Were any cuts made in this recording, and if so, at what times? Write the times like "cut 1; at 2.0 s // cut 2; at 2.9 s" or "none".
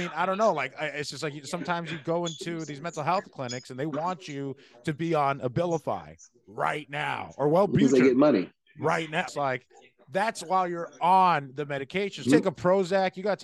cut 1; at 9.3 s // cut 2; at 12.3 s

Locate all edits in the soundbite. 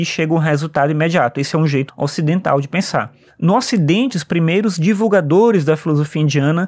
cut 1; at 1.9 s // cut 2; at 4.1 s

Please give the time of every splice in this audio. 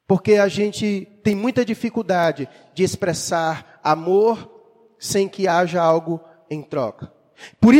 none

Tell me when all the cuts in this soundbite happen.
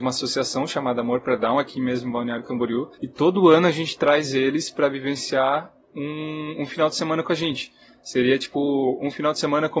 cut 1; at 2.9 s

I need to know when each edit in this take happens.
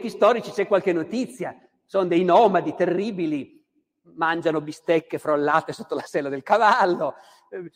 none

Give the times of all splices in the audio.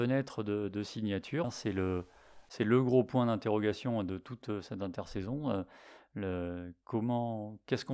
cut 1; at 1.4 s

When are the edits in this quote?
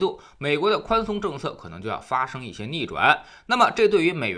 none

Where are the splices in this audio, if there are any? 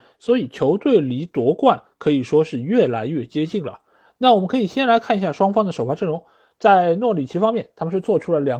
none

